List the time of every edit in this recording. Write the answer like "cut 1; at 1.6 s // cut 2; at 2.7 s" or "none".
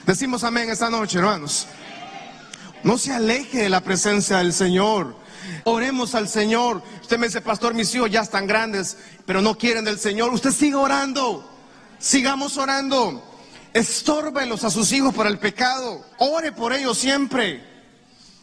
cut 1; at 2.7 s // cut 2; at 5.6 s // cut 3; at 16.1 s